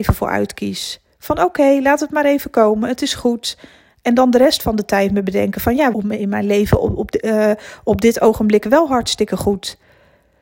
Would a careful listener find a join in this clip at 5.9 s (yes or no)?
yes